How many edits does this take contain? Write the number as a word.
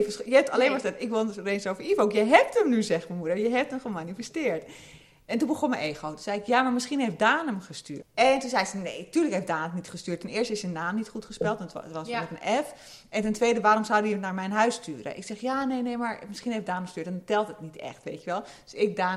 one